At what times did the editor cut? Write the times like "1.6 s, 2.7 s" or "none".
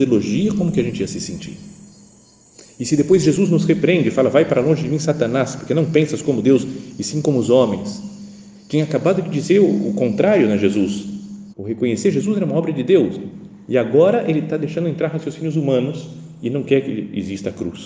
11.5 s